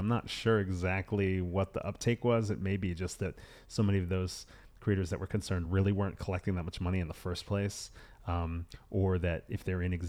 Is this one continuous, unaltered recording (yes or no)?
yes